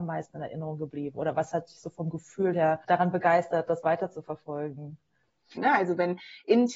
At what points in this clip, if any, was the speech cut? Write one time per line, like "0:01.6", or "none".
0:02.8
0:05.6